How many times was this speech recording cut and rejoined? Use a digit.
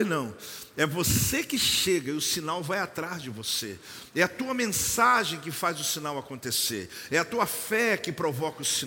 0